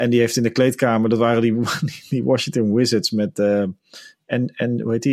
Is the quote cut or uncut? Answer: uncut